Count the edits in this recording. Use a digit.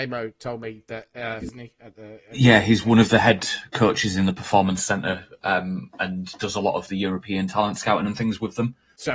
1